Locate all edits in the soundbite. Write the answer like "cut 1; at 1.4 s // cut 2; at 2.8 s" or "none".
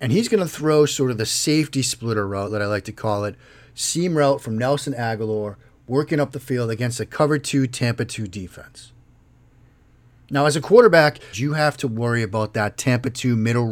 cut 1; at 11.3 s